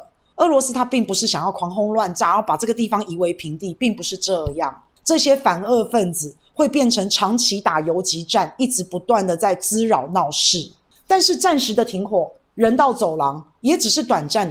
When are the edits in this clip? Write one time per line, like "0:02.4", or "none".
0:05.0
0:11.0